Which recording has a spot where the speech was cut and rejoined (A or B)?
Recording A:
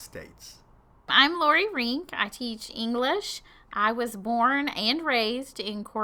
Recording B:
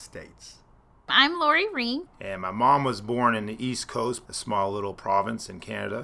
B